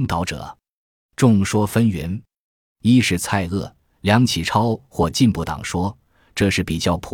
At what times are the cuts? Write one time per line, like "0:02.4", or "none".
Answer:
none